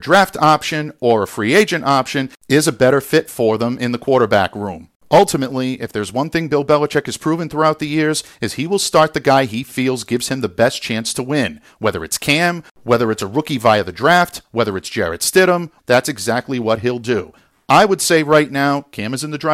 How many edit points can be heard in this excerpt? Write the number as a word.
one